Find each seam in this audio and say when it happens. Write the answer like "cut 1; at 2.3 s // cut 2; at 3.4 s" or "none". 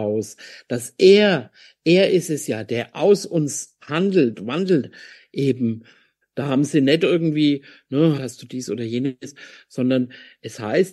cut 1; at 6.2 s // cut 2; at 8.2 s